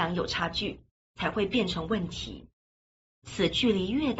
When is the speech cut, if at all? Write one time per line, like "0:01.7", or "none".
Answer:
0:03.1